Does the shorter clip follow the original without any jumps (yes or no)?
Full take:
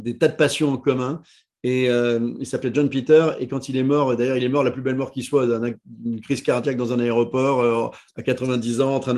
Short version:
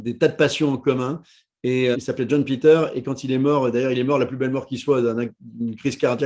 no